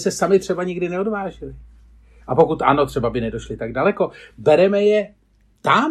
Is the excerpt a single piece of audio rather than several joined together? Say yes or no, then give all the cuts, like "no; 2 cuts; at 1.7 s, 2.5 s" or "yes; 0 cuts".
yes; 0 cuts